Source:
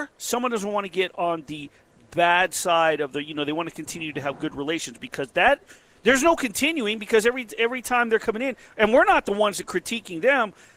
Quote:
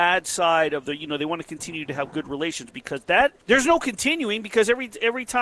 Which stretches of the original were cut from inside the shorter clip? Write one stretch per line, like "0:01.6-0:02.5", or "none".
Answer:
0:05.7-0:06.0

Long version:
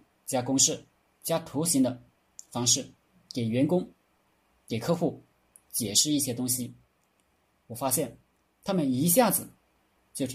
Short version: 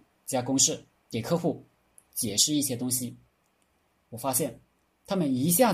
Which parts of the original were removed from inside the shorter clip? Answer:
0:01.1-0:04.6

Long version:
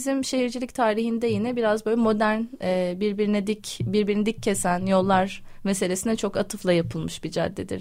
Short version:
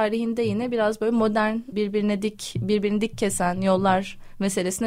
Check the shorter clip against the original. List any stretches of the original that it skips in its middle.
0:02.6-0:03.0

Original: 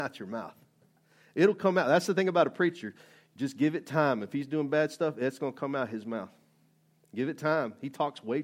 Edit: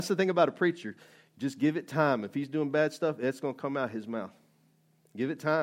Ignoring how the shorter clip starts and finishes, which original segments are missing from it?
none

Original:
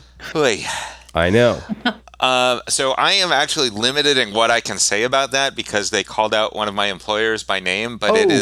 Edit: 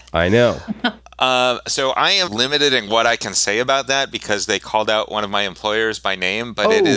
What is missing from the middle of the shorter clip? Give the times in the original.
0:03.3-0:03.7

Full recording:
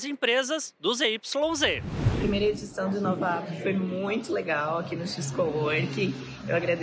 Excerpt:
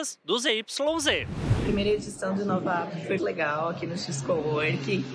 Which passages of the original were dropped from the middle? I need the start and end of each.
0:03.7-0:04.3

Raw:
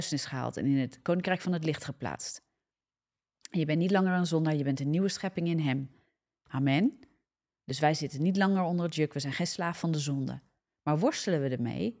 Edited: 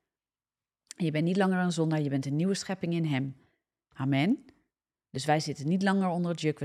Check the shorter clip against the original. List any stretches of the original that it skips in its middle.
none

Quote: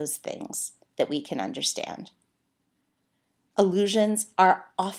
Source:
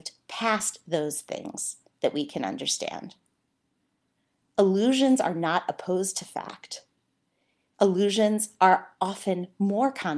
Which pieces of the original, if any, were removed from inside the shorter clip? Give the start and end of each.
0:04.5-0:07.7

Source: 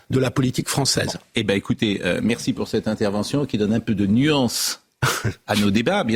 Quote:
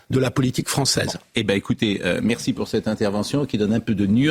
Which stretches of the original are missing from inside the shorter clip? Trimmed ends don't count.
none

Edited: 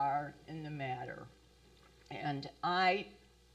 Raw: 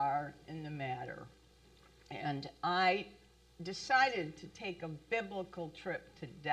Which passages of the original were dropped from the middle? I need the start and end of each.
none

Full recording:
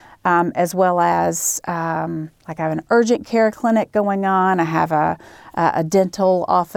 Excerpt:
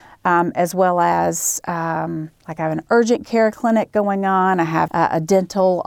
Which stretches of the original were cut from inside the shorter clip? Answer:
0:04.9-0:05.5

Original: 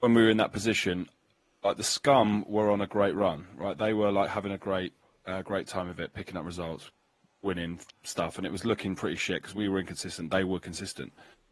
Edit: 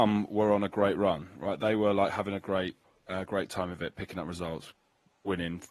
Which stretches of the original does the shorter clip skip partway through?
none

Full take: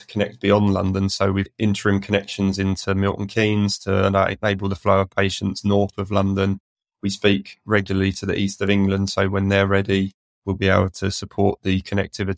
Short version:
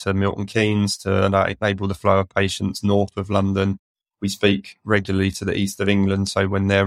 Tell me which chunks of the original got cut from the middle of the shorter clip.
none

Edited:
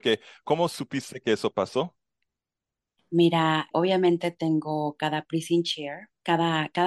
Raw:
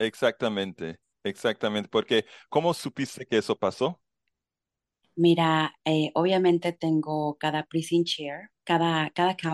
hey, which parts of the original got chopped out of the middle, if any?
0:05.8-0:06.1

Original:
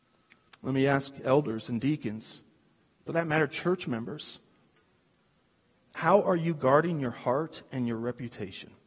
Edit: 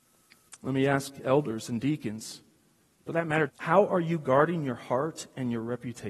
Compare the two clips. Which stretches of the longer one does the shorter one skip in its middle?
0:03.5-0:05.8

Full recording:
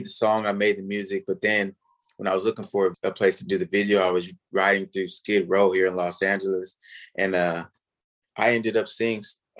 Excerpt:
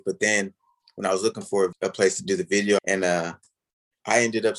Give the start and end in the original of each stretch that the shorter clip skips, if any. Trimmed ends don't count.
0:04.0-0:07.1

